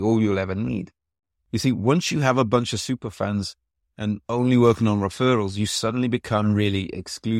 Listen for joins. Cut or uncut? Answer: uncut